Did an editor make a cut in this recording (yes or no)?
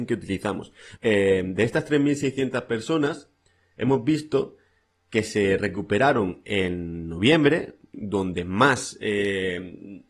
yes